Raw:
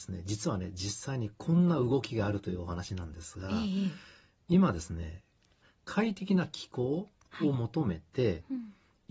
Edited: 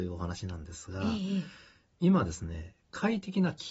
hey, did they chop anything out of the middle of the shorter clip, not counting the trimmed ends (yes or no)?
yes